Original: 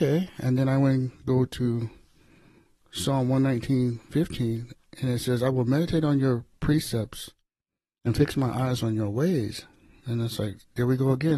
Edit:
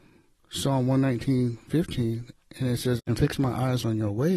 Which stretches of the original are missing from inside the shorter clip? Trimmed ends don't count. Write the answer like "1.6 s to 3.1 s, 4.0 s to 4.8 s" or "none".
5.4 s to 8.0 s